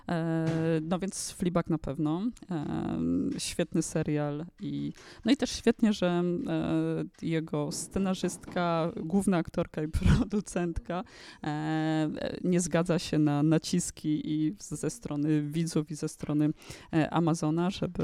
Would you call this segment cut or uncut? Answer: uncut